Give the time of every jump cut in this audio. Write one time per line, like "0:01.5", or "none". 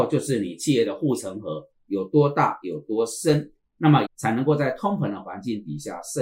0:04.0